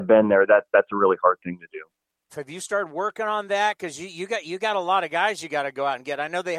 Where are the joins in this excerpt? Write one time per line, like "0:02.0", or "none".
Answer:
0:02.3